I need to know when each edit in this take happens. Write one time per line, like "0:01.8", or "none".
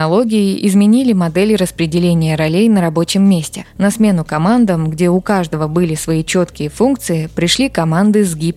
none